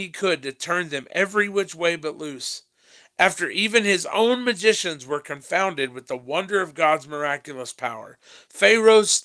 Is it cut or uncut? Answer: uncut